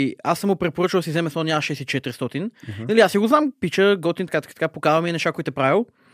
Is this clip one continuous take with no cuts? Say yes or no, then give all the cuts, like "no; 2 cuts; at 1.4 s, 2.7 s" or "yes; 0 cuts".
no; 1 cut; at 4.3 s